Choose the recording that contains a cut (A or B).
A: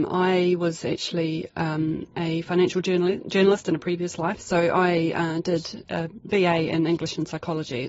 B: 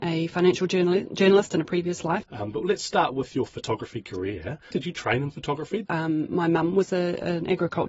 B